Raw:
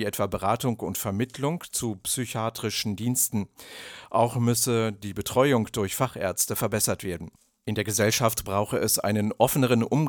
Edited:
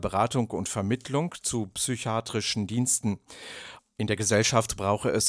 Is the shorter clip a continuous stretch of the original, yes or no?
no